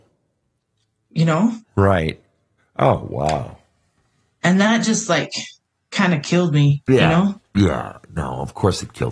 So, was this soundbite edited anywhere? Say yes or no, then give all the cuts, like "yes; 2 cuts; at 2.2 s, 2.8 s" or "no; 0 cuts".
yes; 1 cut; at 2.6 s